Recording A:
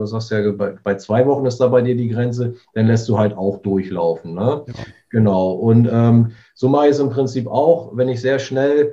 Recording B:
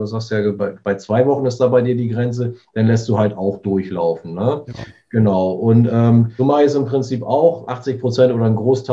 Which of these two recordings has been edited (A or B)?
B